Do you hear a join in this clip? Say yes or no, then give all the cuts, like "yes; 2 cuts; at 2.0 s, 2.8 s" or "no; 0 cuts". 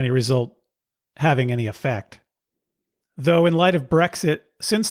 yes; 1 cut; at 3.0 s